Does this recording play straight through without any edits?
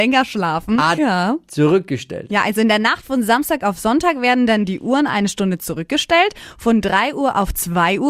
no; 1 cut; at 1.0 s

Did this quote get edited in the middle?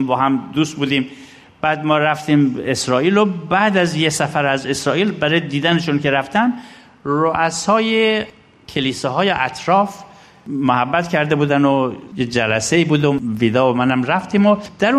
no; 0 cuts

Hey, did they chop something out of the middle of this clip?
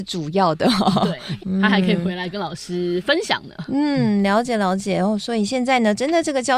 yes; 1 cut; at 1.4 s

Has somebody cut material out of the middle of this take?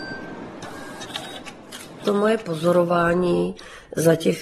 no; 0 cuts

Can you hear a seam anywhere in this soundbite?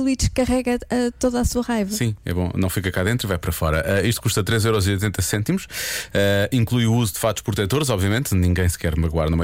no; 0 cuts

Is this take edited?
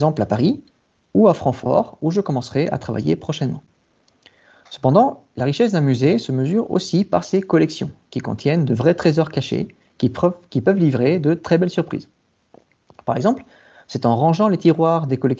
no; 0 cuts

